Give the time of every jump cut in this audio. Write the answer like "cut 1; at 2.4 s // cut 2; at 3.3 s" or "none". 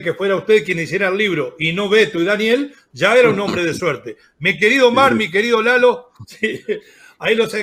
none